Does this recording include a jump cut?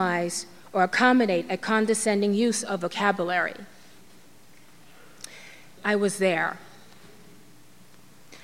yes; 1 cut; at 5.8 s

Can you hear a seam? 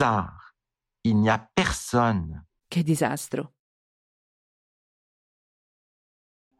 yes; 1 cut; at 2.6 s

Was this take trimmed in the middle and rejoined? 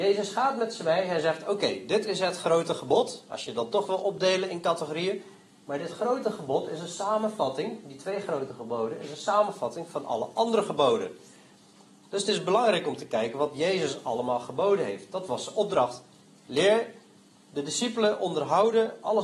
no; 0 cuts

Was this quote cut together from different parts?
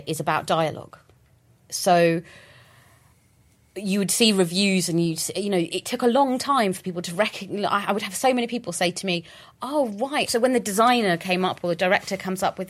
no; 0 cuts

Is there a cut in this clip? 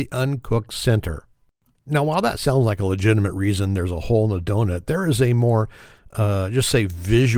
no; 0 cuts

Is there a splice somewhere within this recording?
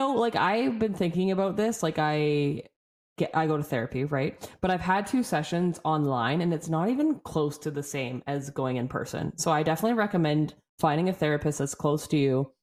no; 0 cuts

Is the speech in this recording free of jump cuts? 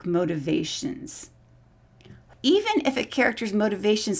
no; 1 cut; at 2.3 s

